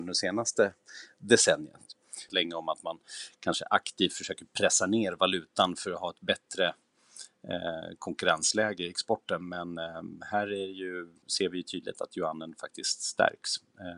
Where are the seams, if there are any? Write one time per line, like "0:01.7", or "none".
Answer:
0:02.3
0:11.2